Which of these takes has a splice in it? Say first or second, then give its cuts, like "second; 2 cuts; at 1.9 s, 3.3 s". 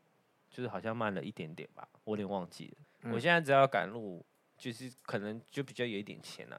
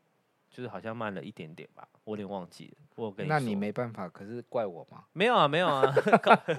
first; 1 cut; at 2.8 s